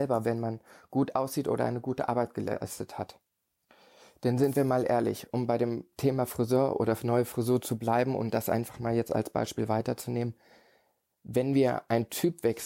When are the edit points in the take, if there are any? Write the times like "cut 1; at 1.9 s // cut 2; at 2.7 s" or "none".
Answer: none